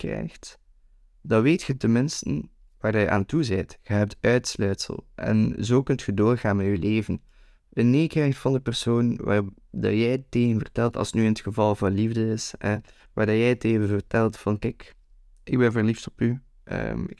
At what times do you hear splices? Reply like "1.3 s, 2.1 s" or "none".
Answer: 7.6 s